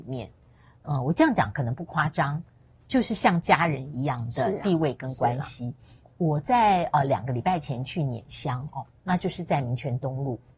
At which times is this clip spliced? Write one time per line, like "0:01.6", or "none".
none